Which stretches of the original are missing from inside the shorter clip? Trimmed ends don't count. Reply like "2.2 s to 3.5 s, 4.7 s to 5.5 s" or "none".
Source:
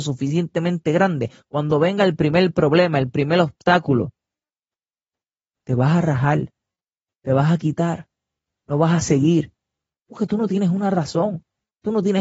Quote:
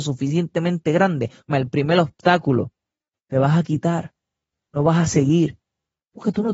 1.5 s to 2.9 s, 4.5 s to 7.0 s